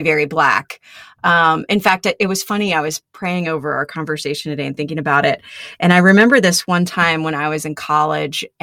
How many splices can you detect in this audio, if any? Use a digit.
0